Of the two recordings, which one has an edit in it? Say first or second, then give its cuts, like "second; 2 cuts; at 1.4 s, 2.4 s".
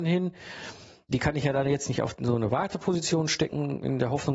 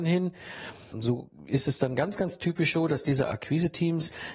second; 1 cut; at 0.9 s